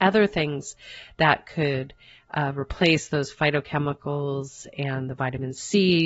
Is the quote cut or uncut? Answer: uncut